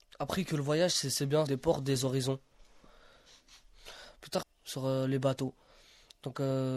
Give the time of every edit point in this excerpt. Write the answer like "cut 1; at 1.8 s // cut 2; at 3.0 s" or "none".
cut 1; at 1.5 s // cut 2; at 4.4 s